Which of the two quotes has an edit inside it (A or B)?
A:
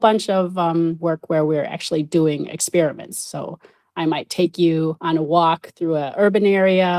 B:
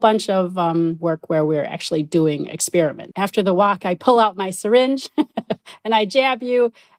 B